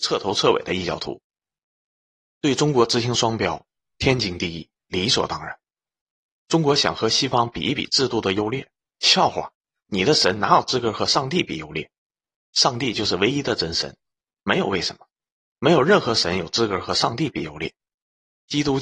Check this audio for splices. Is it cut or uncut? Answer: uncut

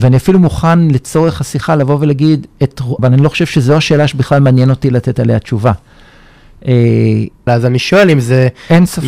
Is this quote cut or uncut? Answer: cut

